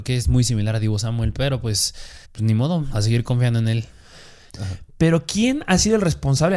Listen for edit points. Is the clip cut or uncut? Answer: cut